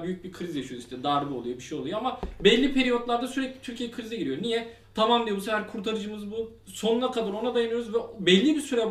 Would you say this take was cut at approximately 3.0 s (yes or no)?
no